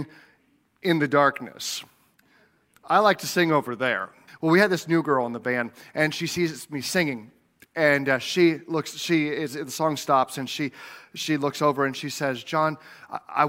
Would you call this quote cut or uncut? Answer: cut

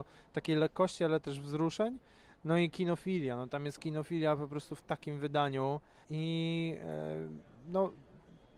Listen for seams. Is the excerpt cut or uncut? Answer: cut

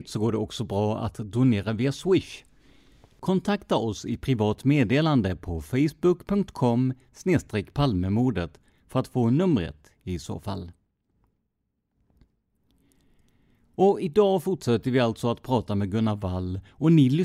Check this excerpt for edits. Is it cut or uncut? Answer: uncut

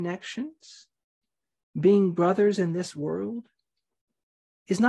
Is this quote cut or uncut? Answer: uncut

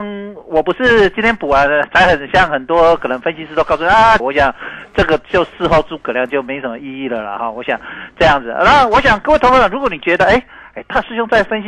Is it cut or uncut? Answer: cut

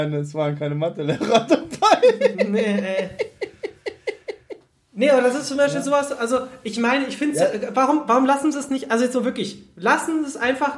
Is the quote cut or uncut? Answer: uncut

